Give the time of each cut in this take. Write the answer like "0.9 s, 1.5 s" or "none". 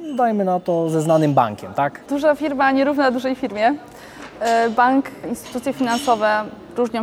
2.1 s